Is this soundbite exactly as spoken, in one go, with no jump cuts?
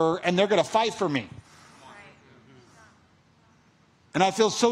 yes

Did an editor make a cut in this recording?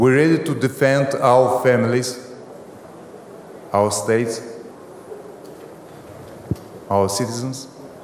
yes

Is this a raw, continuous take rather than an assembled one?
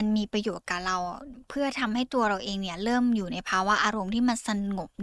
yes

